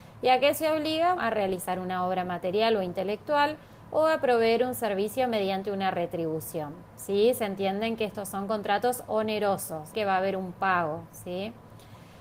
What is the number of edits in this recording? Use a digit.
2